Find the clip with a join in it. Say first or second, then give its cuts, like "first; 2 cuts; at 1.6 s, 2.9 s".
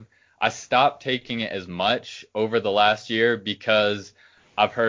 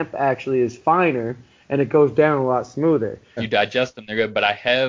second; 1 cut; at 3.4 s